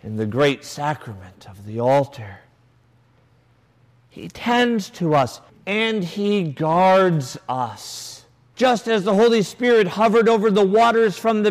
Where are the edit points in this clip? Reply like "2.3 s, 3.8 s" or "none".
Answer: 5.5 s, 8.5 s